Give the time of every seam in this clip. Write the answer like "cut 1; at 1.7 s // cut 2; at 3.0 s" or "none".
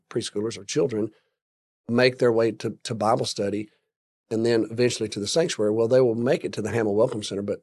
none